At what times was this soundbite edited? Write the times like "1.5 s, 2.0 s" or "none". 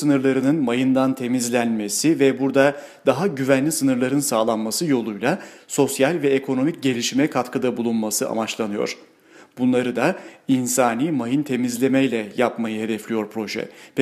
none

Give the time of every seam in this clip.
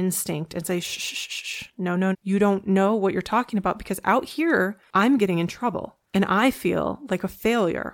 2.1 s

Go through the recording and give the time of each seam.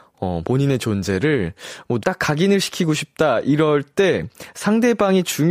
2.0 s

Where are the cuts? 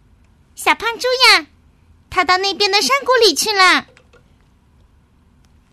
none

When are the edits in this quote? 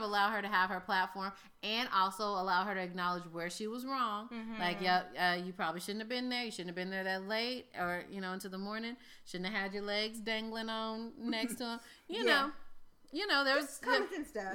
none

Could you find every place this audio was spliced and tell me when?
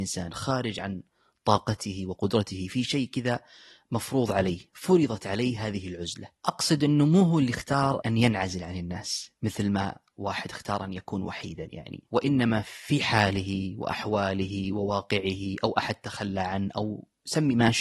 8.0 s, 12.1 s

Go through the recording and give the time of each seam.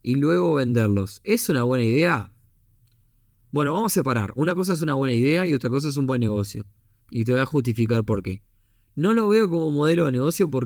7.0 s

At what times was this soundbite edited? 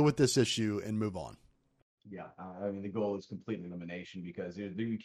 none

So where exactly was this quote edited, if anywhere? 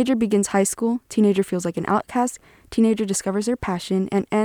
2.7 s

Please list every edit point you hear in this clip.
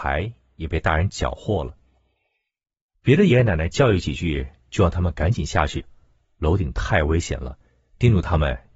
3.3 s

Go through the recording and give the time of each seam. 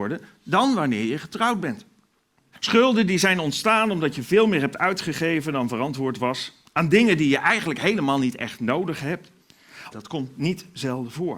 2.5 s, 9.9 s

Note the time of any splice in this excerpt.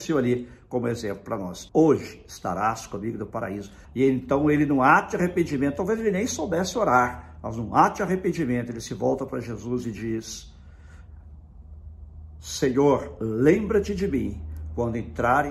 1.7 s, 3.8 s

